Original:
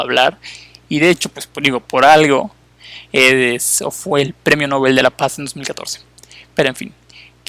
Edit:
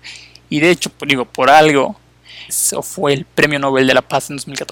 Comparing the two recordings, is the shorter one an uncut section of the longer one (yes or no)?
no